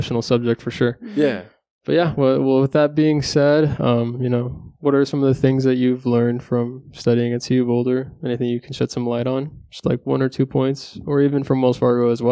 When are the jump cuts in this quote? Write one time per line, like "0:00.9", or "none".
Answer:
none

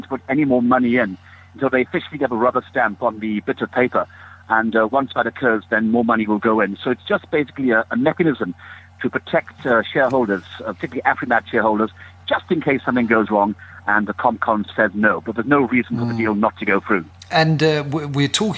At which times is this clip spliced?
none

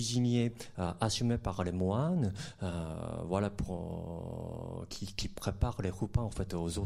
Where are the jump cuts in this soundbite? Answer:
none

